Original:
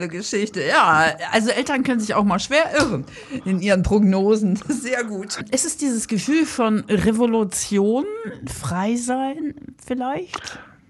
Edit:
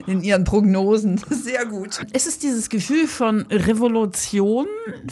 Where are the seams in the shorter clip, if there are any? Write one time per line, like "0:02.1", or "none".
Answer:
none